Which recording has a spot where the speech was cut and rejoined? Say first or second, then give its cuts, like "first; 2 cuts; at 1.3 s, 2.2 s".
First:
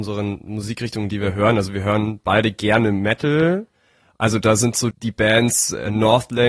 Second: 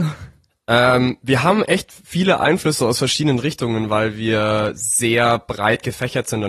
first; 1 cut; at 4.9 s